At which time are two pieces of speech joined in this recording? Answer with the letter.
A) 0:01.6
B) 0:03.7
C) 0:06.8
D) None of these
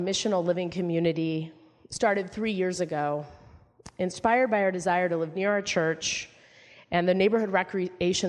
D